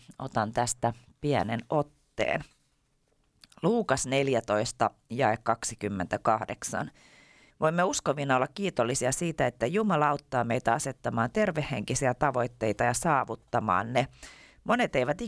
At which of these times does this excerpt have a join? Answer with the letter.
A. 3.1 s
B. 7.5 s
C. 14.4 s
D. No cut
B